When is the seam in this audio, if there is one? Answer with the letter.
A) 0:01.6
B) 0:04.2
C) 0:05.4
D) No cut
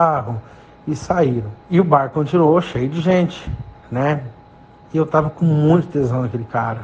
A